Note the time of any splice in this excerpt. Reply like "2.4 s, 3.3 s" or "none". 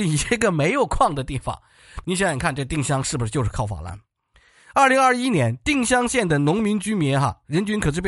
2.0 s